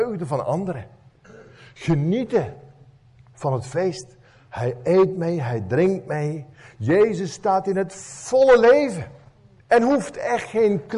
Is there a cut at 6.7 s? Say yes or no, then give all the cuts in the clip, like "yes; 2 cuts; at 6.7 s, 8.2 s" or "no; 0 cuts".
no; 1 cut; at 9.6 s